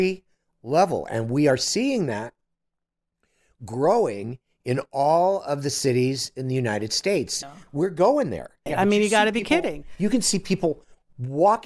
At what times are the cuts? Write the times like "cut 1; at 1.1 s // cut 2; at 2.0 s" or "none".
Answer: cut 1; at 7.4 s // cut 2; at 8.7 s